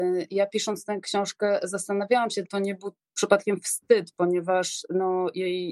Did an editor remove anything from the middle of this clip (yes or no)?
yes